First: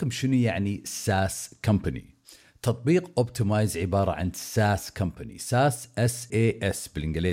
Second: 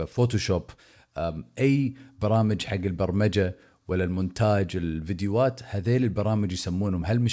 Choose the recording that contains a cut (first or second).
first